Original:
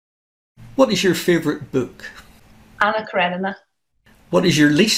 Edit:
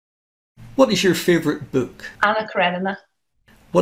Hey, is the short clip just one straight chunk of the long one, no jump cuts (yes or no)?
no